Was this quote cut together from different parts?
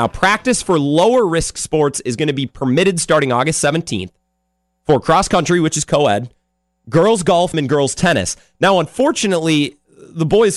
yes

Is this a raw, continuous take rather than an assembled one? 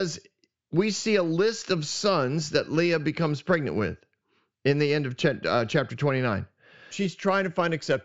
no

